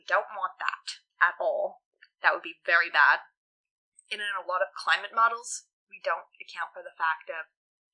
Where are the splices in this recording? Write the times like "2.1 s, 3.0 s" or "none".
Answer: 1.1 s